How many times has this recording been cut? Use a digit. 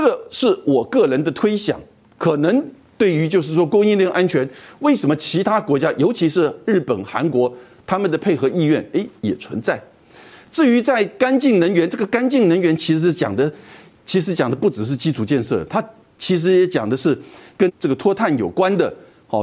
0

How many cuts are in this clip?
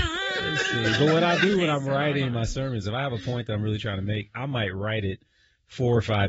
1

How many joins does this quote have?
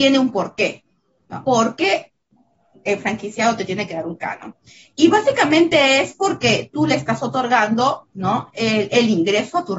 1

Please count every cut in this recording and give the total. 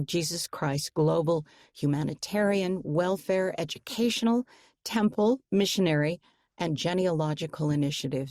0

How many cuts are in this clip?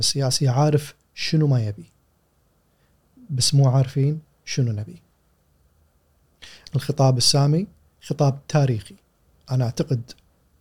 1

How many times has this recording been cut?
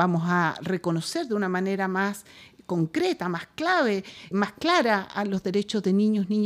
1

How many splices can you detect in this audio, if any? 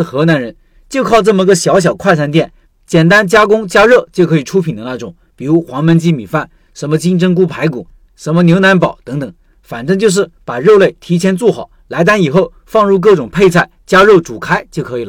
1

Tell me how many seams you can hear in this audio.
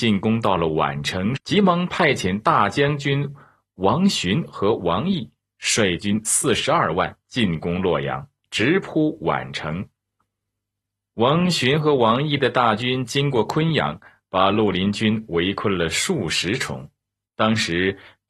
1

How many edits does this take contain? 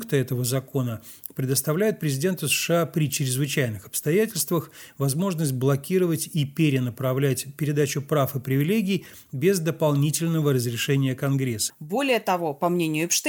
1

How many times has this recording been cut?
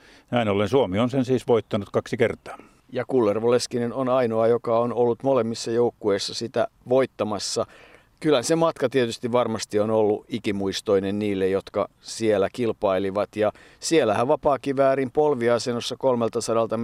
0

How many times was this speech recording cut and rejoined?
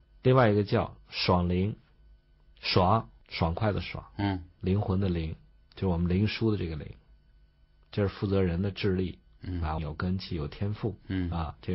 2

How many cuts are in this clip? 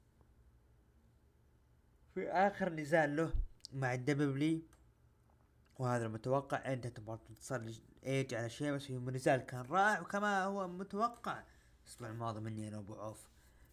0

